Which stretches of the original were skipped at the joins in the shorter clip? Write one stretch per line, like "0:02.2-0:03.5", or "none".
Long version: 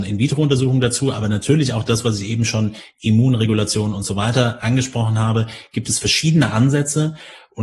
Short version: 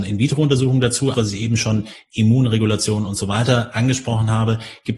0:01.1-0:02.0

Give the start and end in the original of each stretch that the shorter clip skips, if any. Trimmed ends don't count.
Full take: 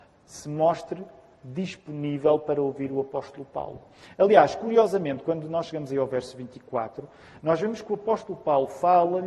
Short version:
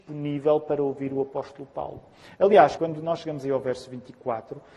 0:04.6-0:05.2

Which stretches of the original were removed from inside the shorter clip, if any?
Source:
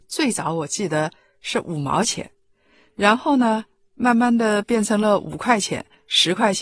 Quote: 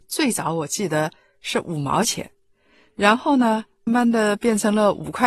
0:03.9-0:04.1

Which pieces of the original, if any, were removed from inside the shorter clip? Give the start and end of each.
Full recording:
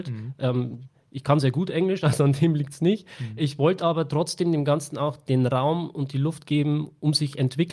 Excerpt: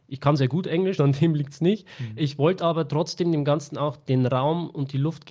0:02.0-0:02.2

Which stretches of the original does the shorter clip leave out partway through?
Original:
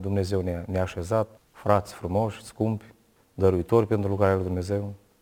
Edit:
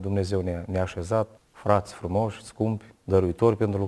0:02.9-0:03.2

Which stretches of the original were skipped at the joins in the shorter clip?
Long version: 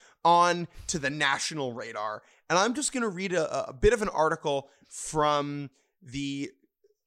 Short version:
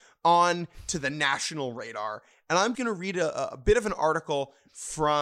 0:02.7-0:02.9

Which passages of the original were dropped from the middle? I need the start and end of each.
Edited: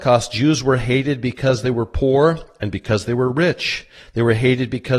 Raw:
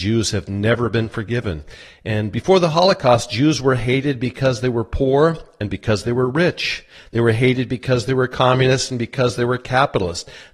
none

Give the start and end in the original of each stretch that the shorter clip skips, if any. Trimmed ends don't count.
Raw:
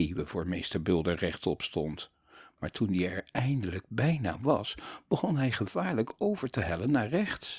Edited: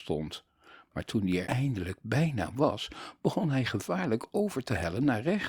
0:03.1-0:03.3

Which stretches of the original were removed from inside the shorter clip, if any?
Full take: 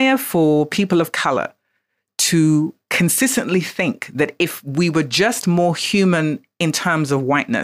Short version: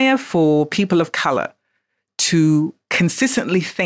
none

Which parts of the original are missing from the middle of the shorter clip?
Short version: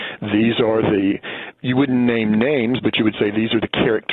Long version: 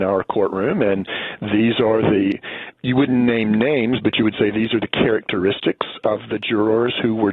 none

